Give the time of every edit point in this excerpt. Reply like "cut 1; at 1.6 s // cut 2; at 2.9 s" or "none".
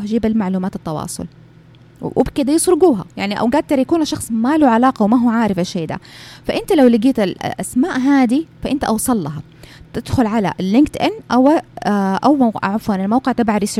none

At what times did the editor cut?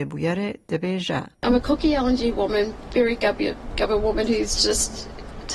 cut 1; at 1.3 s

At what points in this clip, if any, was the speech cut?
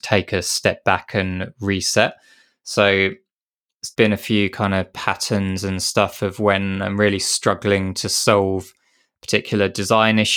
cut 1; at 3.9 s

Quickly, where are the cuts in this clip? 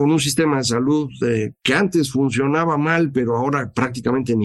none

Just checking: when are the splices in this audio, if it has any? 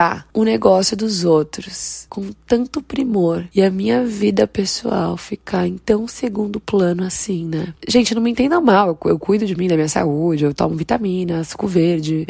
cut 1; at 7.8 s

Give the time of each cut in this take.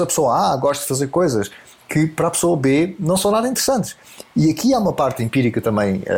none

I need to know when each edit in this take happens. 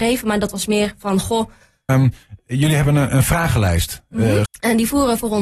cut 1; at 1.9 s // cut 2; at 4.4 s

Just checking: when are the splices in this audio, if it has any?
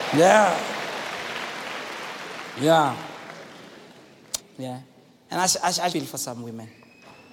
cut 1; at 4.4 s // cut 2; at 5.9 s

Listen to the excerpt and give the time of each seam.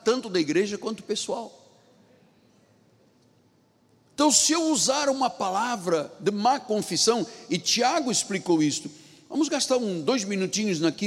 none

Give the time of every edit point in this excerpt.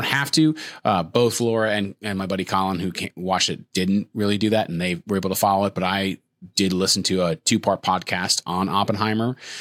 none

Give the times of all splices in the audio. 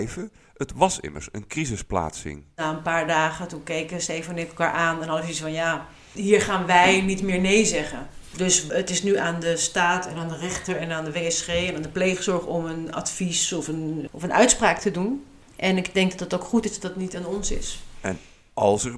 cut 1; at 14.1 s

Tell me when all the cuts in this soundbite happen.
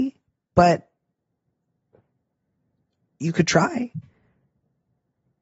none

